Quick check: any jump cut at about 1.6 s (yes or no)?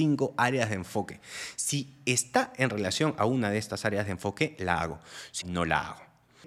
no